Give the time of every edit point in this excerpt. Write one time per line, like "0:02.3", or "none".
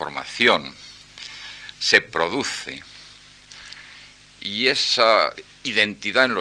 0:01.7